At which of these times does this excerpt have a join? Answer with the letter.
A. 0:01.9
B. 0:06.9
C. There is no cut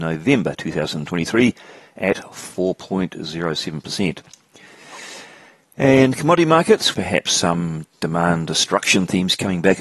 B